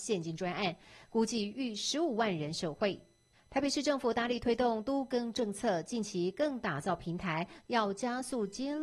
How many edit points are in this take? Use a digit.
1